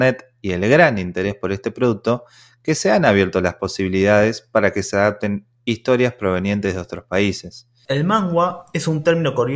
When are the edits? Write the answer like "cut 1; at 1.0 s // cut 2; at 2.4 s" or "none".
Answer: cut 1; at 7.8 s